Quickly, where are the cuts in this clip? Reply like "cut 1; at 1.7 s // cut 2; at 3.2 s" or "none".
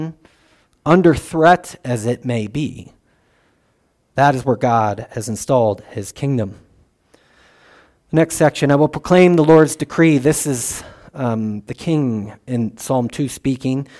none

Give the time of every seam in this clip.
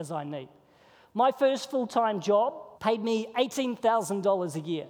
cut 1; at 2.7 s

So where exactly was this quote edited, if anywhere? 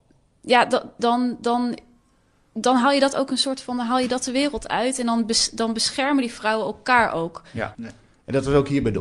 cut 1; at 7.7 s

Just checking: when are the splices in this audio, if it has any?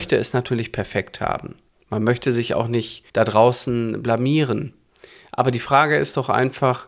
cut 1; at 3.1 s

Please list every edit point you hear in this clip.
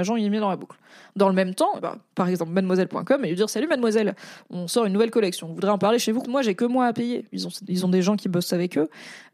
cut 1; at 1.8 s // cut 2; at 6.2 s // cut 3; at 7.3 s

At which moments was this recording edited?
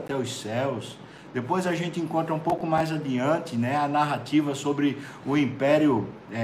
none

